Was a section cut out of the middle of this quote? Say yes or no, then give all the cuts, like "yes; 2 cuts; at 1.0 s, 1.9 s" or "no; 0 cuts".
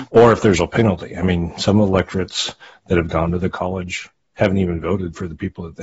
no; 0 cuts